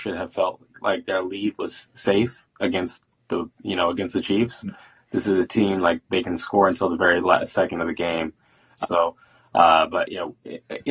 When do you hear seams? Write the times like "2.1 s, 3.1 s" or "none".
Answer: 8.8 s